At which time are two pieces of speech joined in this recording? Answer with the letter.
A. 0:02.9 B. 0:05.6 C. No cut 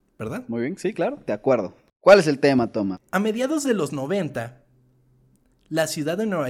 A